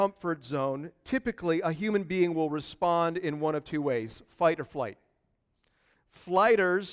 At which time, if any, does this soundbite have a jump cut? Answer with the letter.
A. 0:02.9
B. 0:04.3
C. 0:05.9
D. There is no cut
C